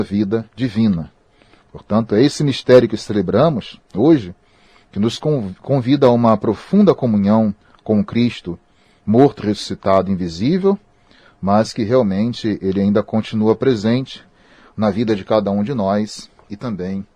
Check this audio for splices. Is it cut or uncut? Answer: uncut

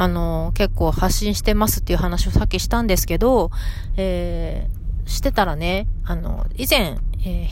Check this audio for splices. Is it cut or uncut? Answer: uncut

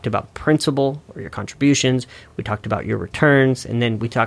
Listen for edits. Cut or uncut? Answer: uncut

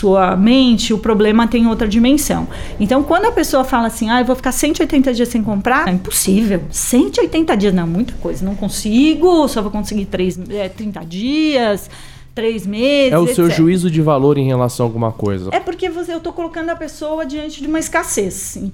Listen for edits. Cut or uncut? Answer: cut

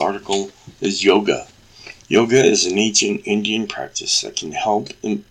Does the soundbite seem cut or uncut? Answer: uncut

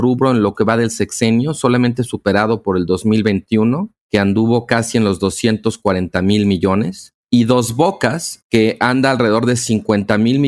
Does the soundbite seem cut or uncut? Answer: cut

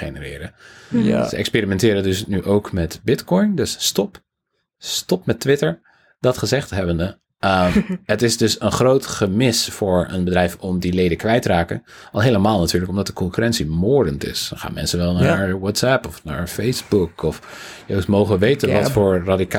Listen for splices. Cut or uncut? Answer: uncut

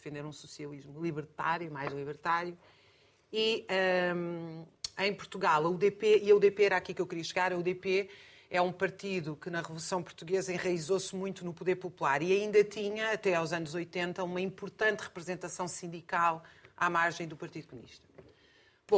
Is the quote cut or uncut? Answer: uncut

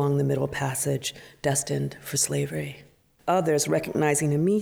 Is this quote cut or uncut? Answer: cut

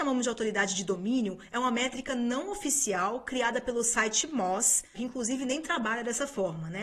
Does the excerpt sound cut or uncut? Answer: cut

